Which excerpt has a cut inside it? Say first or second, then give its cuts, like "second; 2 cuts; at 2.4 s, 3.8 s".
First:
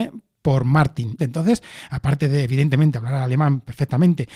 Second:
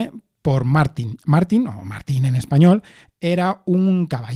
first; 1 cut; at 1.2 s